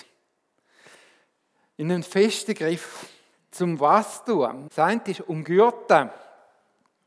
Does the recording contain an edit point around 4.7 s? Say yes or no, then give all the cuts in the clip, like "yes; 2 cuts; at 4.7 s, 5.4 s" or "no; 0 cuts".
yes; 2 cuts; at 3.3 s, 4.7 s